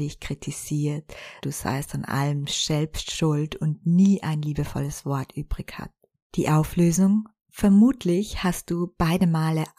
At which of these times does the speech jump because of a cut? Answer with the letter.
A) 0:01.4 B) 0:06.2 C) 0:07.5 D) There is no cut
A